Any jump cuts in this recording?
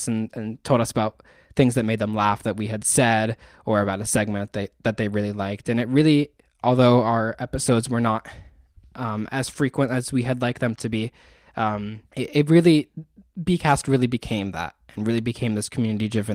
yes; 1 cut; at 12.1 s

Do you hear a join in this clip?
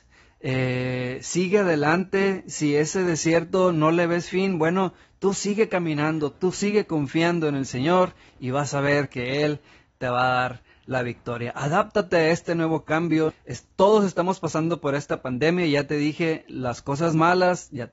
yes; 1 cut; at 13.3 s

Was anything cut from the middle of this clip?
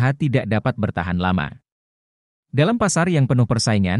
no; 0 cuts

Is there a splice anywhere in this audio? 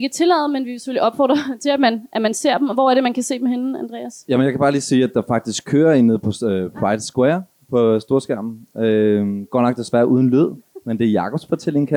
no; 0 cuts

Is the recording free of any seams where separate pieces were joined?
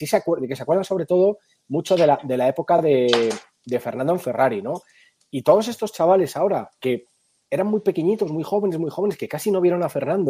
yes; 0 cuts

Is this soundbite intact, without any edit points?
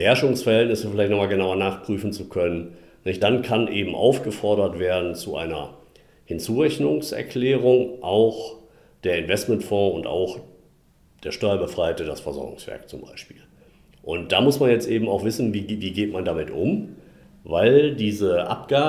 yes; 0 cuts

